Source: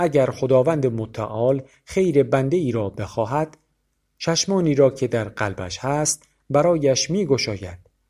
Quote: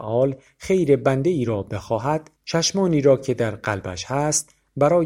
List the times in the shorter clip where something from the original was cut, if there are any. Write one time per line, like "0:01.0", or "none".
0:02.4